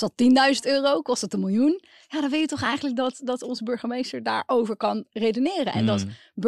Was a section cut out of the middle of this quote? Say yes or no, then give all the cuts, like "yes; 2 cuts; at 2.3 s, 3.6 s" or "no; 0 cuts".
no; 0 cuts